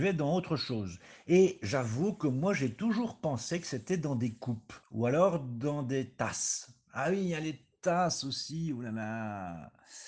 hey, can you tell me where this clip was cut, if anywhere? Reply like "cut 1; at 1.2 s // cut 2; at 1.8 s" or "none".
cut 1; at 4.8 s